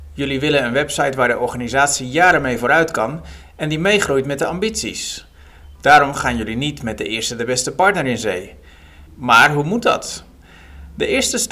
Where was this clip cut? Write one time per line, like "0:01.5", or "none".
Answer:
0:05.8
0:09.1